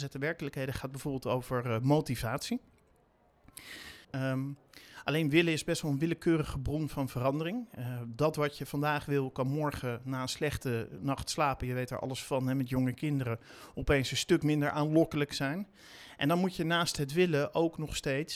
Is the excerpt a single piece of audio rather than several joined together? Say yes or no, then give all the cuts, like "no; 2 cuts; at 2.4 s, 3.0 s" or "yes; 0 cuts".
no; 1 cut; at 4.0 s